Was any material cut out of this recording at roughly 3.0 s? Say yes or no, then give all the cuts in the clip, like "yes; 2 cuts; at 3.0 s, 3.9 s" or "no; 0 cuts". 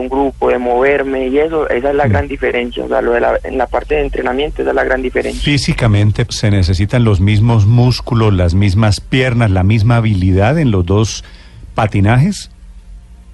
no; 1 cut; at 6.3 s